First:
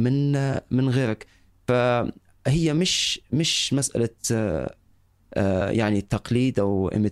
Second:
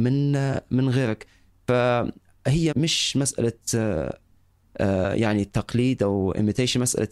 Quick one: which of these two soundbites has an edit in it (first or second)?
second